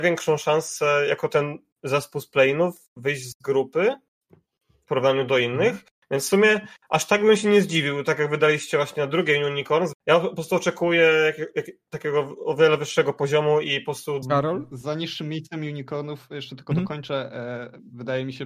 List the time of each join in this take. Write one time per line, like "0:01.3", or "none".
0:09.9
0:14.2